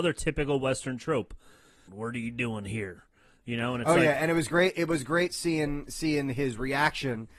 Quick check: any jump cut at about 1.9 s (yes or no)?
yes